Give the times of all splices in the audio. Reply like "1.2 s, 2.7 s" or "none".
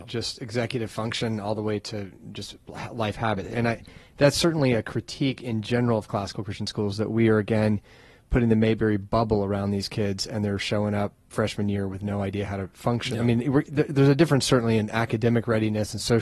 3.5 s